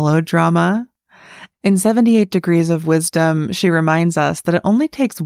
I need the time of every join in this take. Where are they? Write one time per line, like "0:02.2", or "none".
0:01.5